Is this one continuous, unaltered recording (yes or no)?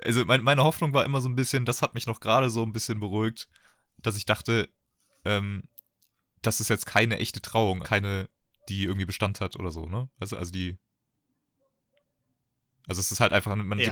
no